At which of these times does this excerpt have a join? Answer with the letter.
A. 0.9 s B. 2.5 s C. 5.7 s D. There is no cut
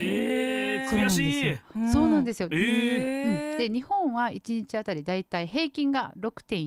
B